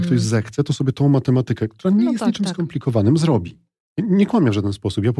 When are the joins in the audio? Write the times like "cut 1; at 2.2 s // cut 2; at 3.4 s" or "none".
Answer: cut 1; at 3.9 s